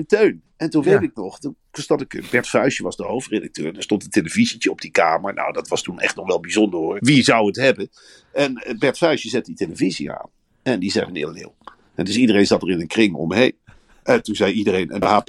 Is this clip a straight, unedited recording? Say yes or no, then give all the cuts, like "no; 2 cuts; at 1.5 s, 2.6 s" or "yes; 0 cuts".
no; 2 cuts; at 7.0 s, 11.1 s